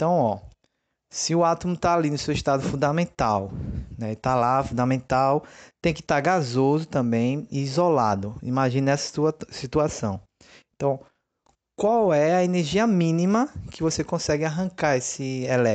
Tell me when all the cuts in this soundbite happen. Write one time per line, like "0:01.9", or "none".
none